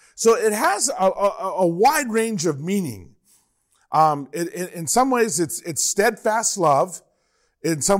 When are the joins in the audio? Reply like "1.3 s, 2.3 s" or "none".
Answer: none